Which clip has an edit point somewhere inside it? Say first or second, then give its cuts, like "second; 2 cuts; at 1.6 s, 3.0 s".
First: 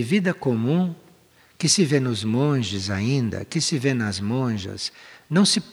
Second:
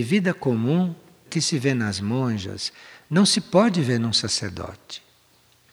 second; 1 cut; at 1.3 s